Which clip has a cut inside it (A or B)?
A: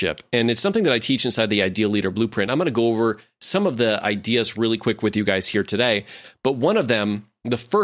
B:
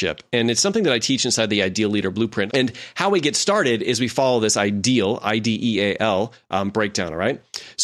B